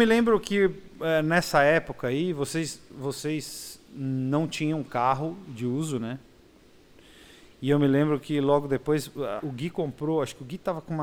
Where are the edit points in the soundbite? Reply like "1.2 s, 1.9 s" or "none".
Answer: 9.4 s